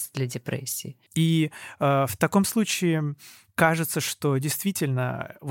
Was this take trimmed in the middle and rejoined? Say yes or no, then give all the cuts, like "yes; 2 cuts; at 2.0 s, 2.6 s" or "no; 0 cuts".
yes; 1 cut; at 1.1 s